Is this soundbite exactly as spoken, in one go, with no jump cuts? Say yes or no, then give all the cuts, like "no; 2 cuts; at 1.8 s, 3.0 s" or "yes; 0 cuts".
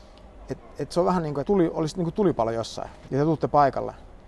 no; 2 cuts; at 1.4 s, 3.1 s